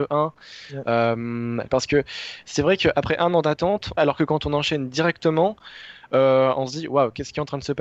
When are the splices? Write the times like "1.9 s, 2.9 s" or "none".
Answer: 1.7 s, 4.0 s